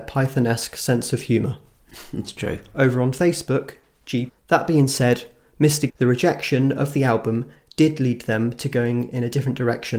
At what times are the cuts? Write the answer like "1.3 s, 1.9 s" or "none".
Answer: 4.3 s, 5.9 s